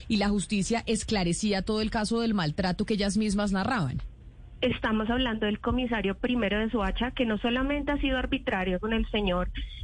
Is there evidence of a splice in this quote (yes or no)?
no